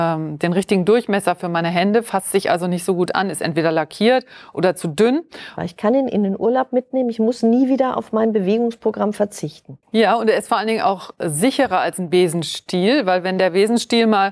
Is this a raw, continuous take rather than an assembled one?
no; 2 cuts; at 5.6 s, 9.8 s

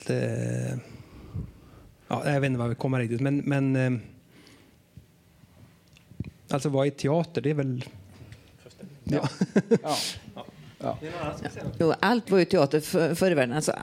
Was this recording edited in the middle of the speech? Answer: no; 0 cuts

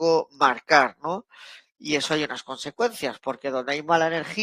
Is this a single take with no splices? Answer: no; 1 cut; at 1.6 s

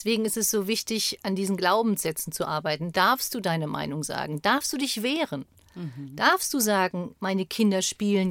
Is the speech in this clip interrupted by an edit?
no; 0 cuts

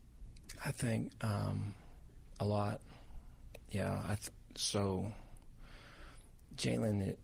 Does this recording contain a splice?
no; 0 cuts

